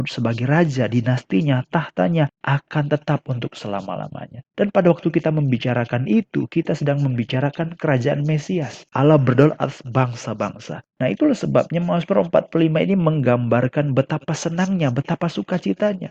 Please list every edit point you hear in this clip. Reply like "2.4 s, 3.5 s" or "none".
8.9 s, 10.9 s